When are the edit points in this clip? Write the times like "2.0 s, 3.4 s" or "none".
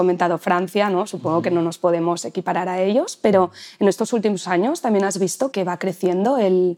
5.5 s

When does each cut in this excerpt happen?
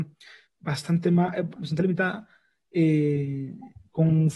1.6 s

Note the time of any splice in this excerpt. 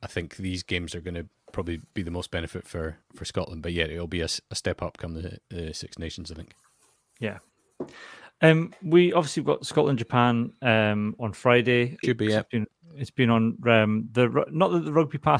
12.0 s

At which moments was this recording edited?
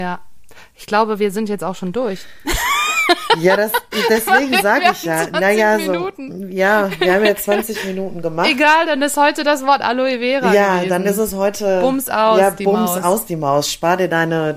none

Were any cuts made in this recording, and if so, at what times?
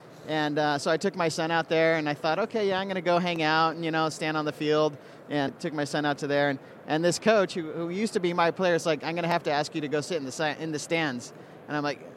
5.5 s

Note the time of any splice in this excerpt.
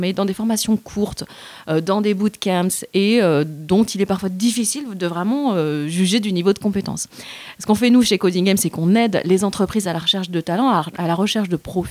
none

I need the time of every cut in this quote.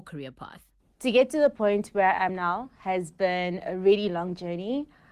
none

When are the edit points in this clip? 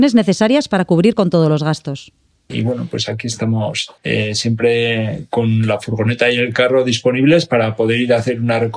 2.3 s, 4.0 s

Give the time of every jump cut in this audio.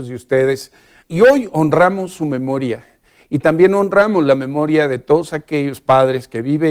1.0 s

